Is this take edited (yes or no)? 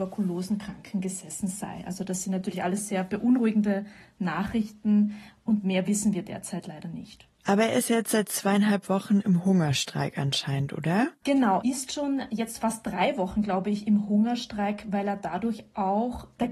yes